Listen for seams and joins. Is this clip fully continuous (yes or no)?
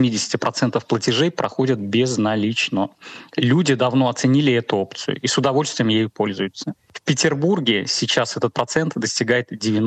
yes